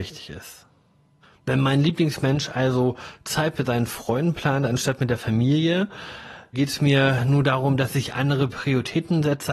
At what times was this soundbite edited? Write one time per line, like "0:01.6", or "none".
0:06.5